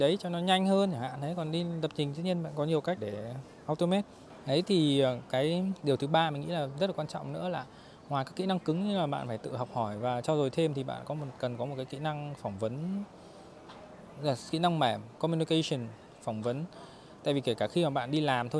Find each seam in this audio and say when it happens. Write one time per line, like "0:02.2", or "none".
0:03.0
0:15.2